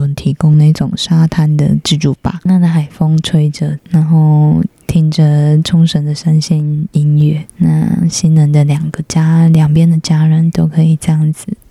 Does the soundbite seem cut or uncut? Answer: cut